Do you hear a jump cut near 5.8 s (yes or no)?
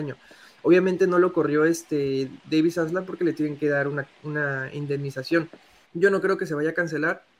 yes